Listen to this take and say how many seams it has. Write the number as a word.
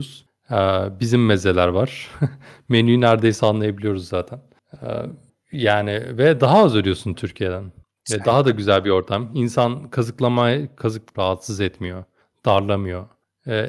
one